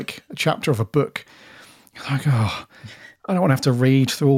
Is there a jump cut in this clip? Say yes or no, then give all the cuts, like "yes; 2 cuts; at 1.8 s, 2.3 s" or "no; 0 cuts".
no; 0 cuts